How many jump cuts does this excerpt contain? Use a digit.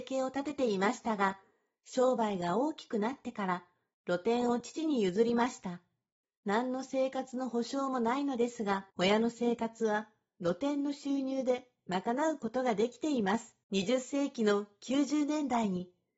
3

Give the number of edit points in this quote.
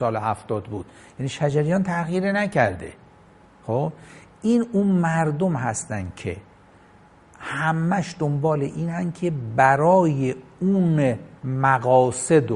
1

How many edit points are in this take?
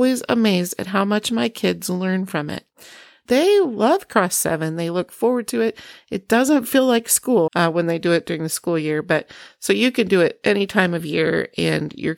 1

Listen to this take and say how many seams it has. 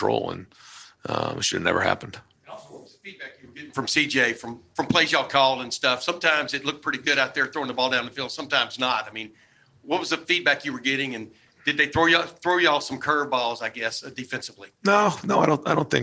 0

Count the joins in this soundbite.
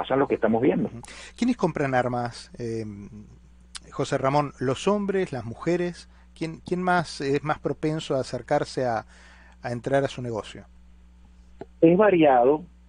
0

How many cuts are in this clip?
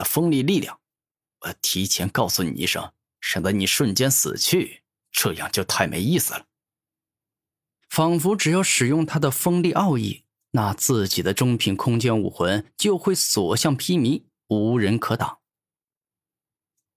1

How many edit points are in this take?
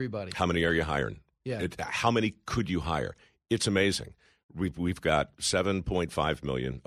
0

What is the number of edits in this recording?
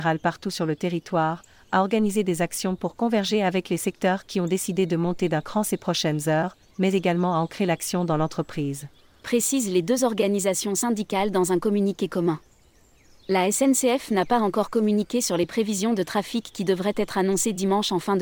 0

